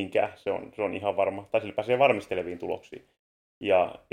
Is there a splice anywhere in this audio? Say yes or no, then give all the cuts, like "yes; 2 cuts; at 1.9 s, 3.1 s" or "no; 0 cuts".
no; 0 cuts